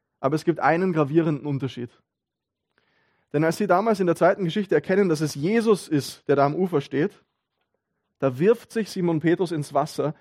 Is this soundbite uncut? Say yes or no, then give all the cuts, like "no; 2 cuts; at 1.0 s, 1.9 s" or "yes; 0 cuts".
yes; 0 cuts